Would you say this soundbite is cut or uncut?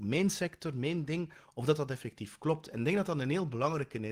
uncut